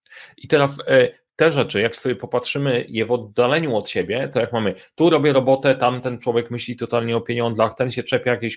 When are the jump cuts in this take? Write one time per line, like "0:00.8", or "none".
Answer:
none